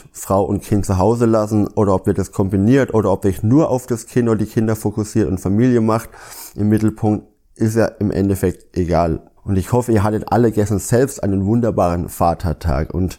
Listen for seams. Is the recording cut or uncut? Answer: cut